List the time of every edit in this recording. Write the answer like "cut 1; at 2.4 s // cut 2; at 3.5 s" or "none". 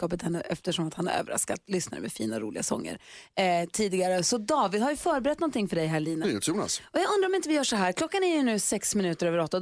cut 1; at 6.2 s